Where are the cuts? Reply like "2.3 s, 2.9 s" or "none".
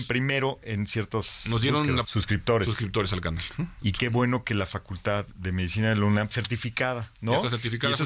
2.0 s, 3.8 s, 6.3 s